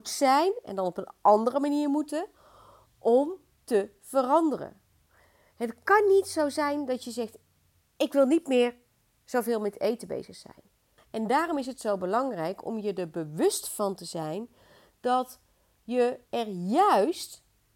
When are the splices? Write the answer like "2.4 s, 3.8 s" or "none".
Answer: 11.0 s, 16.3 s